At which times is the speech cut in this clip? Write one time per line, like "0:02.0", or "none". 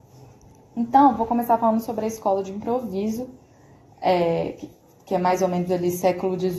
none